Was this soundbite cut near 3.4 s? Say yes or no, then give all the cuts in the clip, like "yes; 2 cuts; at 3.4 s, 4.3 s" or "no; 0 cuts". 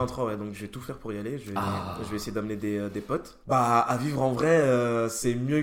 yes; 1 cut; at 3.4 s